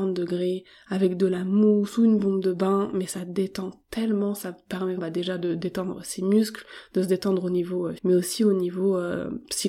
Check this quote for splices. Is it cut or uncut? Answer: cut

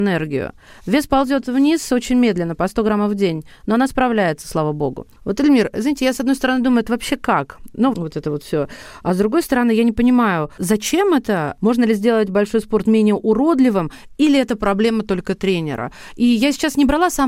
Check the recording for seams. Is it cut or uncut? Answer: cut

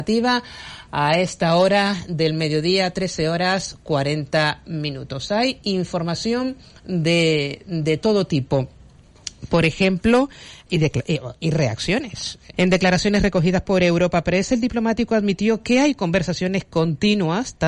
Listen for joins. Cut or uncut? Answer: cut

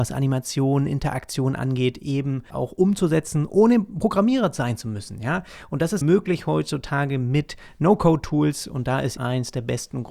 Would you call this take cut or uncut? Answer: cut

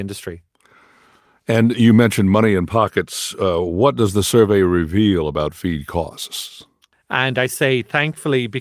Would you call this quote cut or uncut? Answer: cut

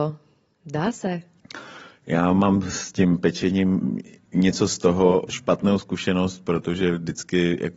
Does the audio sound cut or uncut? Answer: cut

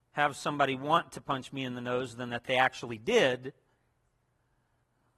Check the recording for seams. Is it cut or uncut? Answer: uncut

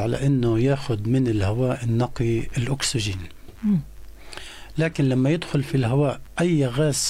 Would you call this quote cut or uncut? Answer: uncut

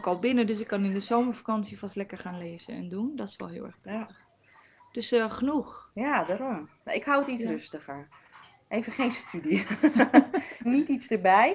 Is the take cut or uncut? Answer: cut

